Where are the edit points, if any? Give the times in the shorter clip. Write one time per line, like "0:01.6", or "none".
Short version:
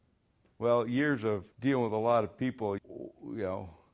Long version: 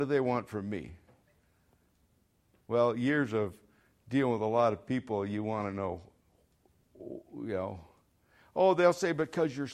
0:01.5
0:02.8